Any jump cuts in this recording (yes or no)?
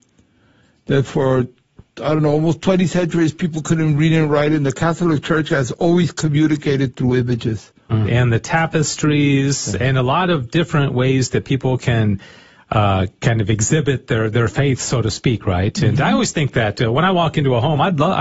yes